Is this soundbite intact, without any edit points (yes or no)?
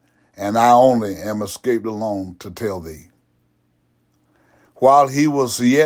yes